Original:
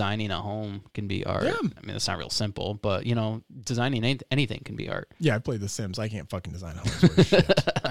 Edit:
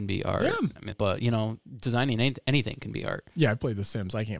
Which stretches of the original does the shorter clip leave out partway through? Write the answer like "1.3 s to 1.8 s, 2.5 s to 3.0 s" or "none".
1.9 s to 2.8 s